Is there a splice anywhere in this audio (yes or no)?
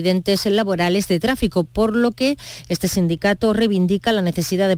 no